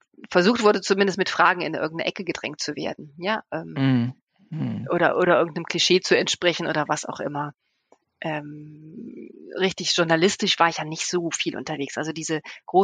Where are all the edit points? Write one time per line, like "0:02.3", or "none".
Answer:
none